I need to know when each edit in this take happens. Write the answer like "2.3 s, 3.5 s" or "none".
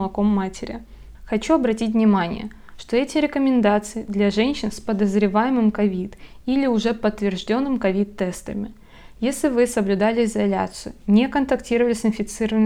1.1 s